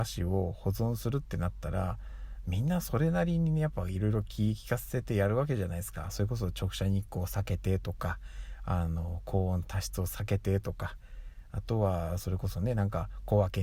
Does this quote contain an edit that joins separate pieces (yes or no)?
no